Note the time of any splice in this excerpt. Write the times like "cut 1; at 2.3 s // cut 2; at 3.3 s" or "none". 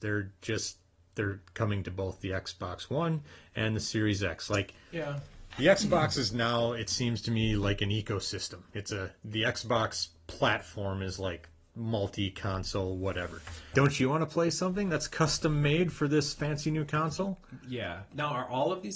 cut 1; at 13.7 s